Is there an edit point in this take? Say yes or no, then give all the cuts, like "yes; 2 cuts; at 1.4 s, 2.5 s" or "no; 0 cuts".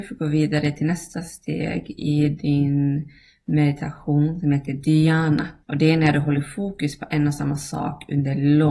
yes; 1 cut; at 5.6 s